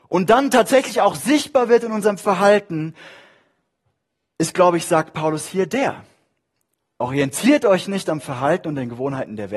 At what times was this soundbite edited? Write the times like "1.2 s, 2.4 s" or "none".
none